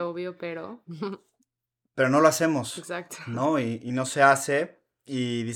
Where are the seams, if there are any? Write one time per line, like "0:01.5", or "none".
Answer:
none